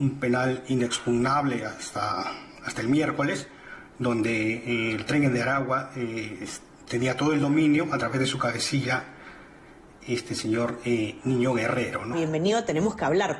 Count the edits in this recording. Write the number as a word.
one